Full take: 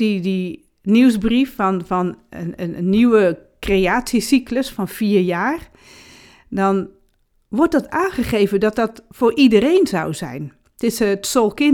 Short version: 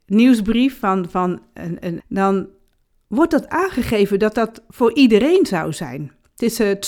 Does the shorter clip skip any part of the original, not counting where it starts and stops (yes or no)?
yes